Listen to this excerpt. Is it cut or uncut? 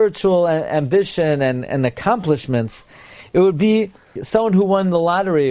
cut